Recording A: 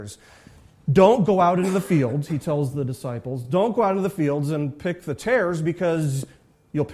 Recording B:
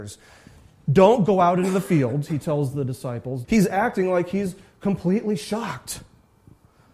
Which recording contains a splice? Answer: B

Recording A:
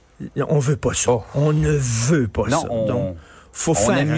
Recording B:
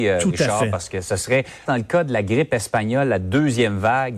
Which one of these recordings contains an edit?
B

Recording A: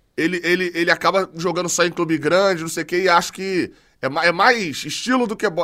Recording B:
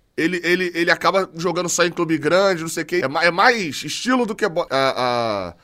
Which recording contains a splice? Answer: B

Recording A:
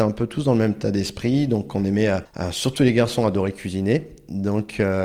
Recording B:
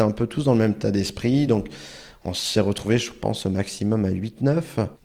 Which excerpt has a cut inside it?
B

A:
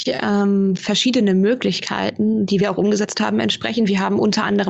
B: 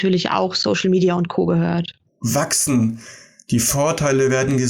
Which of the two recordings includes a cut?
B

